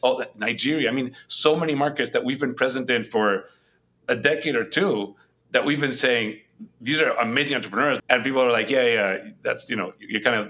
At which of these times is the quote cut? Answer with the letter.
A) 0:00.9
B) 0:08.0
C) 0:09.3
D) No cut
B